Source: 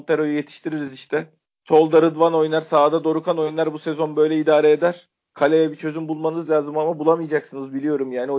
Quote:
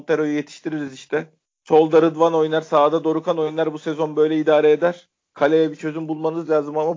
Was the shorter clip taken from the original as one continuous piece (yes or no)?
yes